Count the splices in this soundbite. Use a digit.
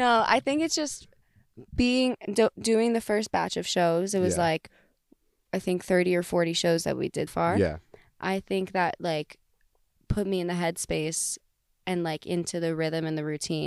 1